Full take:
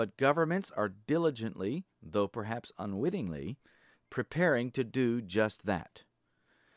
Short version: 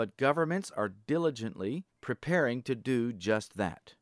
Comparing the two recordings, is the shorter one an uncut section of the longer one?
no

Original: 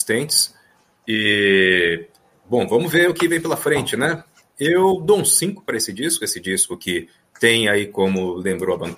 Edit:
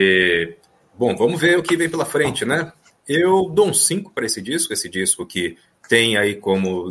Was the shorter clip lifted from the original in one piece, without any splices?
yes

